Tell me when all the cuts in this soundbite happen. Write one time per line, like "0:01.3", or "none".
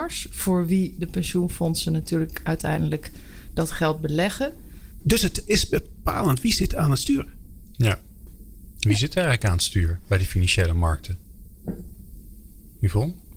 0:05.0